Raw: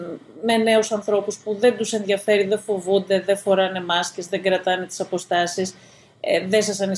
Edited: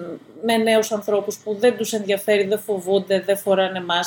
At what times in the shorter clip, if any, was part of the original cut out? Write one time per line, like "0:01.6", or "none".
none